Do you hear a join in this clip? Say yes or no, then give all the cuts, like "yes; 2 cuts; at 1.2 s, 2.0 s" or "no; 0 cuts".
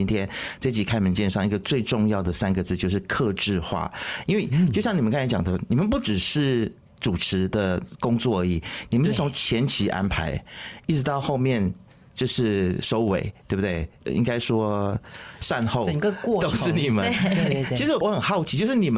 no; 0 cuts